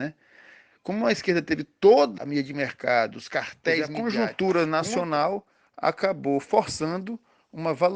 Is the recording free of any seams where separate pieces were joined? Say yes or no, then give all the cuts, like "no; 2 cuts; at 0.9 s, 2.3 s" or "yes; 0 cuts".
no; 1 cut; at 2.2 s